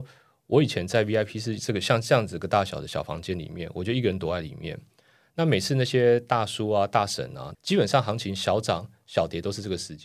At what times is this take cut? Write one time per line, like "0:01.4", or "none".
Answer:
0:07.5